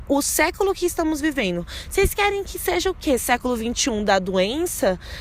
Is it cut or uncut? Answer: uncut